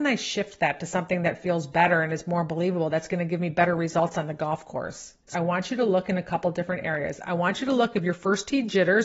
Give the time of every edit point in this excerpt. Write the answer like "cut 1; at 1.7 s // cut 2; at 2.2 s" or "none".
cut 1; at 5.3 s